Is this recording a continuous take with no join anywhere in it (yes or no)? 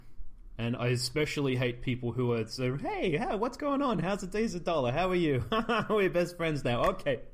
yes